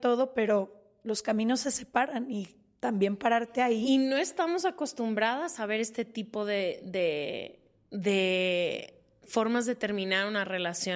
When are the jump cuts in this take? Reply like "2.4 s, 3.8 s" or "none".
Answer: none